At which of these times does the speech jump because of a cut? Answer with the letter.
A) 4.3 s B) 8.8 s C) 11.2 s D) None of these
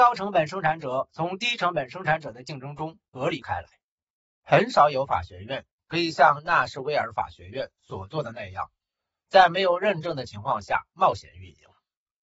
D